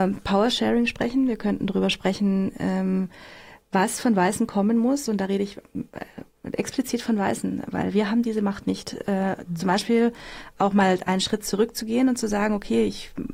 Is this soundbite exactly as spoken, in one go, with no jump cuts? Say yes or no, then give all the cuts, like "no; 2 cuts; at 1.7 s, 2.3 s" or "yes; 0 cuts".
yes; 0 cuts